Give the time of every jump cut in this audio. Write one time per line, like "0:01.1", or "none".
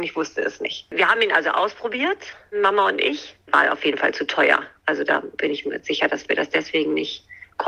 none